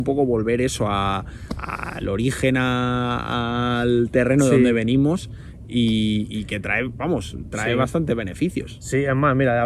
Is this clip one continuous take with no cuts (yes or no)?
yes